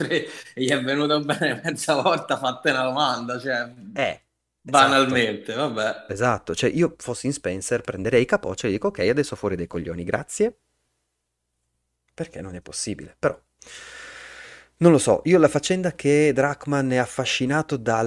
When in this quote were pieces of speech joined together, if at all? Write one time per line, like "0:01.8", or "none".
none